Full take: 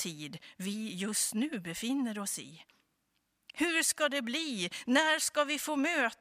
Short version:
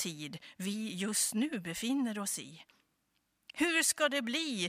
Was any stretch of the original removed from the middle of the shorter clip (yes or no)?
no